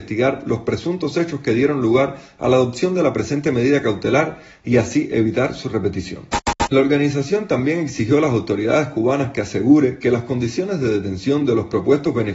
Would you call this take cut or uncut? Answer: cut